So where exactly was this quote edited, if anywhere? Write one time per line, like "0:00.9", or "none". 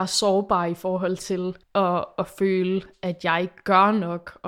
0:01.6